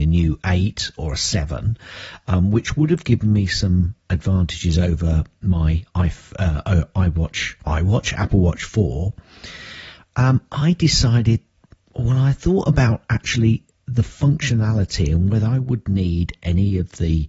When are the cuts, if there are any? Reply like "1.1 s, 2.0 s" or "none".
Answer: none